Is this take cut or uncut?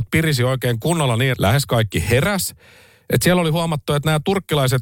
cut